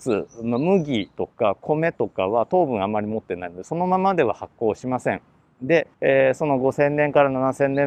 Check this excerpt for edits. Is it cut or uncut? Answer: cut